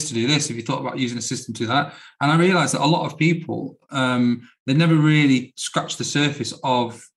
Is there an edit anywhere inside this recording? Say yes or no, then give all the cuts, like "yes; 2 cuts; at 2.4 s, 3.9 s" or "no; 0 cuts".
no; 0 cuts